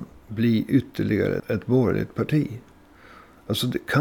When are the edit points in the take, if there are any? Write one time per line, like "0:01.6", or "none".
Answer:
0:01.4